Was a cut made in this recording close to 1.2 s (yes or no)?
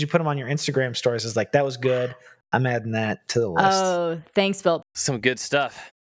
no